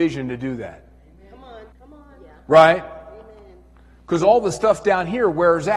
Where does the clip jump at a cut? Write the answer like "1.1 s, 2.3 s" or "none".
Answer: 1.7 s